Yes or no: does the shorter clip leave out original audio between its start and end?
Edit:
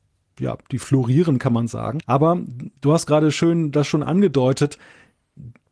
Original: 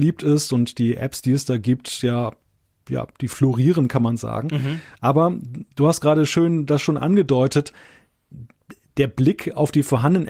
yes